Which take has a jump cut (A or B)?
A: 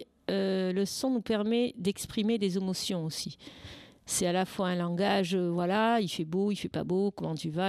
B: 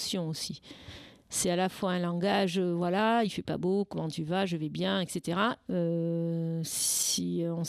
B